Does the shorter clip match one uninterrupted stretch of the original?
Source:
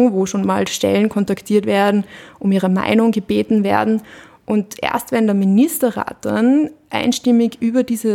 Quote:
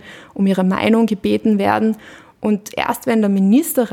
yes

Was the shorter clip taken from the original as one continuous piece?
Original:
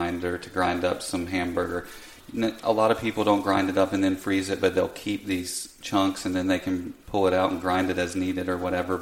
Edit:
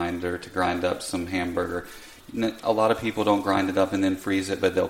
yes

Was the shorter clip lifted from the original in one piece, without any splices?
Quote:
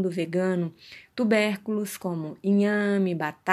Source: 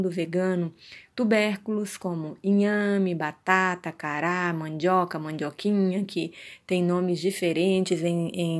yes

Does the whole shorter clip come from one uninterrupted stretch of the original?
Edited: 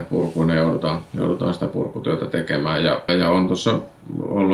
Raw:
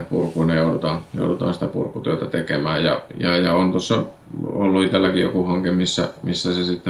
no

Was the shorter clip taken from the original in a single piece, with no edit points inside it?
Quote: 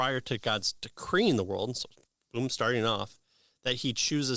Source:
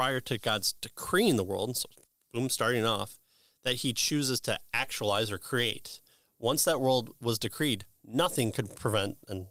yes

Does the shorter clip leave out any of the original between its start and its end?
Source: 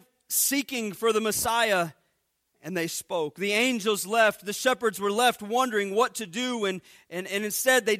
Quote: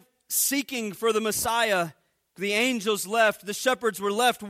yes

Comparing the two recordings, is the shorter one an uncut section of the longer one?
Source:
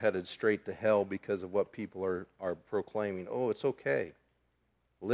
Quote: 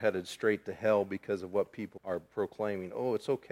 no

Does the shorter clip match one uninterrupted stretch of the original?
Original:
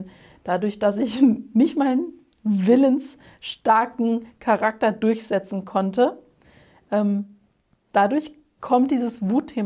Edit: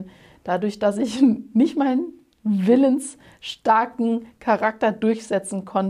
yes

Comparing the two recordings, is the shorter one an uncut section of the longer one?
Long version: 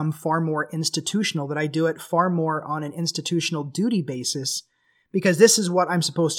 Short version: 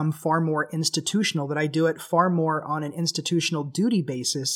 yes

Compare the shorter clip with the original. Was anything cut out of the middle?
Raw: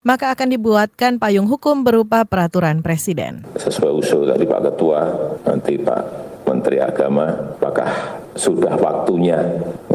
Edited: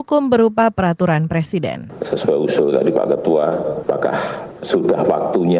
yes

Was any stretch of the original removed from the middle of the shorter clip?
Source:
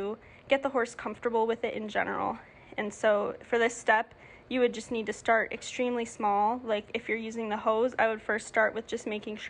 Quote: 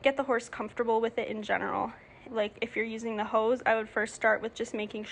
yes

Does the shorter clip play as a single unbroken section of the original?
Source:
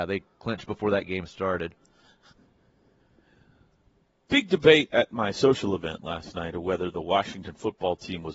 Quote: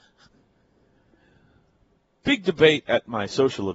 yes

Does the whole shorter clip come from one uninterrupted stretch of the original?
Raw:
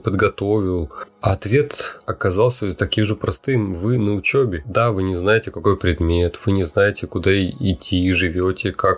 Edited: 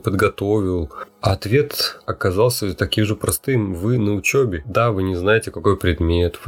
yes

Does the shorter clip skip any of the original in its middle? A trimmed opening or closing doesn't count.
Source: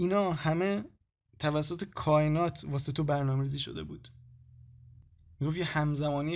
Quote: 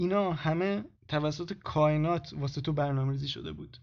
yes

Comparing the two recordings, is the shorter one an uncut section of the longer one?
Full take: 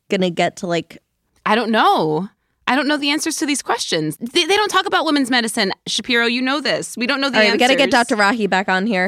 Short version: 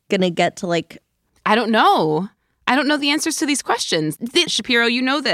no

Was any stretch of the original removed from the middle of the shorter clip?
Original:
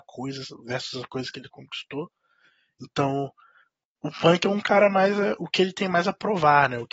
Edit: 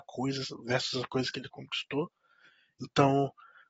no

